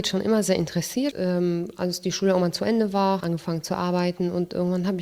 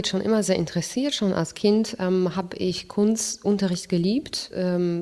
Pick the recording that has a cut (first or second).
first